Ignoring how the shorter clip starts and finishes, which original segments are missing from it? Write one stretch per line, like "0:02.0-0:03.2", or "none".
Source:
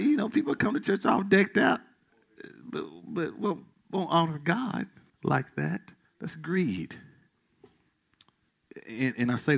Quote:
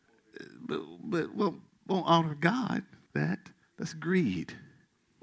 0:05.2-0:05.5

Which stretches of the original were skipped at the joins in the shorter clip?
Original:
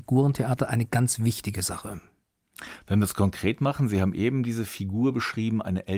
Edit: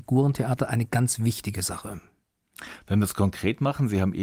none

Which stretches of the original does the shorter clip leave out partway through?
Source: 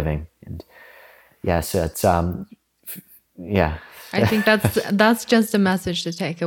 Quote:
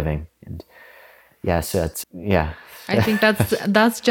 0:02.0-0:03.3

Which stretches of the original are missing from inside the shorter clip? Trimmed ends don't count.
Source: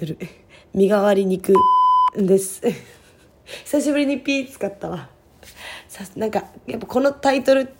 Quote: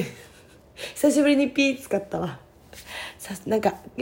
none

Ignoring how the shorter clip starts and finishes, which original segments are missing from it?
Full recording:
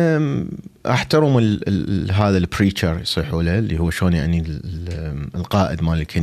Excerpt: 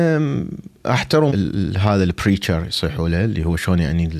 0:01.3-0:01.6

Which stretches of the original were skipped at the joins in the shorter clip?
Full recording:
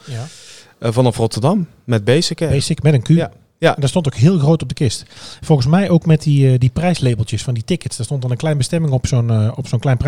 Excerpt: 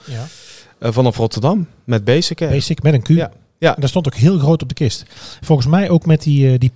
none

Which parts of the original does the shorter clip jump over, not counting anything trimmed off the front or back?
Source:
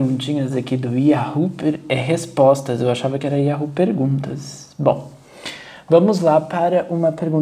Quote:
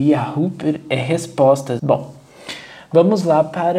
0:02.8-0:04.7

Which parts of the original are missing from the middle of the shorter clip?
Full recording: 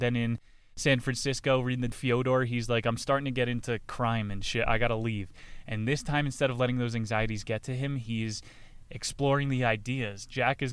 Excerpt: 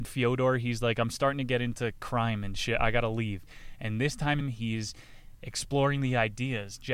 0:06.3-0:07.9

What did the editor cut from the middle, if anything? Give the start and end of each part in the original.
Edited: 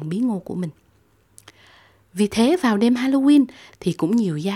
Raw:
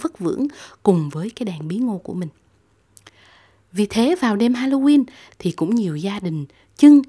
none

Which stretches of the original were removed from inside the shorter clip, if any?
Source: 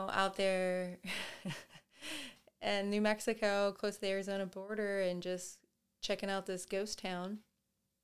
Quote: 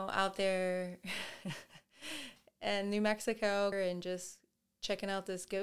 0:03.7-0:04.9

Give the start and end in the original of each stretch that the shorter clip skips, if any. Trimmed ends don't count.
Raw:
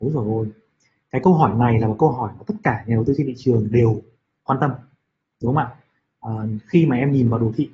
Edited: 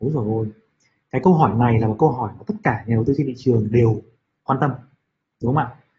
none

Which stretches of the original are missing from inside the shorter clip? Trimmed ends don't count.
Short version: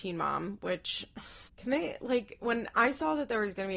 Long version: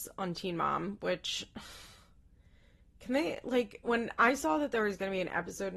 0:01.9-0:02.9

